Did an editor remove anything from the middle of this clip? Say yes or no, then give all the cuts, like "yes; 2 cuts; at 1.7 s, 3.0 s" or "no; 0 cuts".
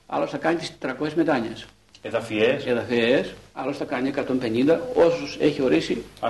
no; 0 cuts